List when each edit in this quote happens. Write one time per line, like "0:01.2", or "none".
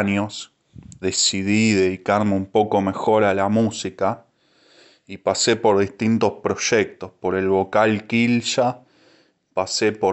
0:01.0